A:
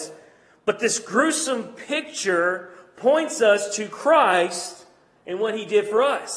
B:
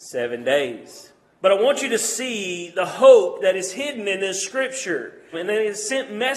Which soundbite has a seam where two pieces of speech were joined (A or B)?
B